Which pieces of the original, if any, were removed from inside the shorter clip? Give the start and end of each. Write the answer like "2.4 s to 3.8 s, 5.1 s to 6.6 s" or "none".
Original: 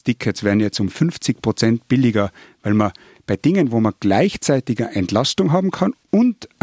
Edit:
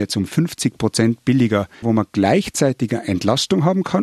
2.5 s to 3.7 s